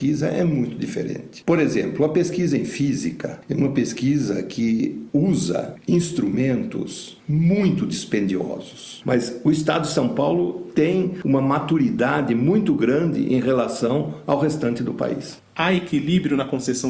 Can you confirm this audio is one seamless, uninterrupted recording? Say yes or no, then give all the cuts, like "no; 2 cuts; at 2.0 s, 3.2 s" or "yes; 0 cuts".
no; 1 cut; at 9.0 s